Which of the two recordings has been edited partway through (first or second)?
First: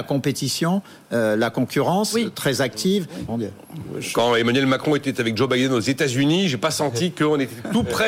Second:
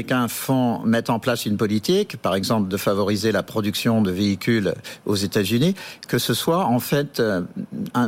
first